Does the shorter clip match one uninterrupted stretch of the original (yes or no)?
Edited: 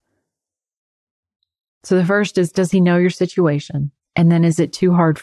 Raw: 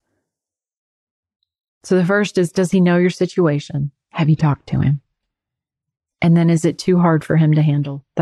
no